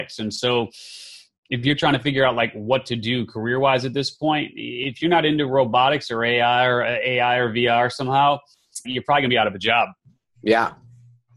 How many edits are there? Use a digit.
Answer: 1